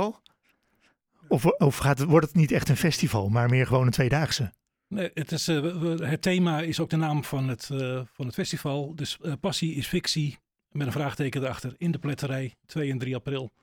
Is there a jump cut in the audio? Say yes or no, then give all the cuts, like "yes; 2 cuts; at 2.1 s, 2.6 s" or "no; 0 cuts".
no; 0 cuts